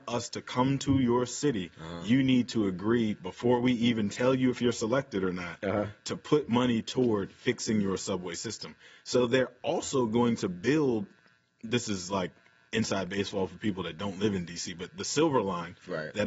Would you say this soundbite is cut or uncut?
uncut